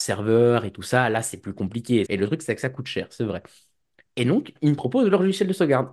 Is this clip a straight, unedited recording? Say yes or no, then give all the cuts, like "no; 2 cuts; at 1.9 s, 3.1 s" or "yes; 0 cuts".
no; 1 cut; at 2.1 s